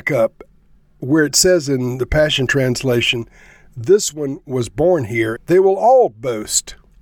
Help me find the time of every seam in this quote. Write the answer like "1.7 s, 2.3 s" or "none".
5.4 s